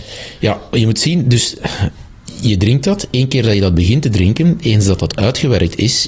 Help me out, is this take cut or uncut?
uncut